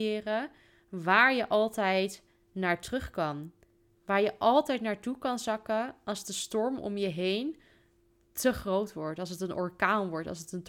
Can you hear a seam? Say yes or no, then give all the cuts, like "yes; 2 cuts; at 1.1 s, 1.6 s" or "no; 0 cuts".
no; 0 cuts